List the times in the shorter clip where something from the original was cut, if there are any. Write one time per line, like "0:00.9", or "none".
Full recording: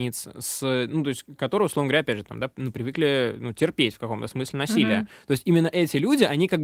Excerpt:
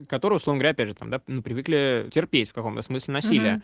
0:02.1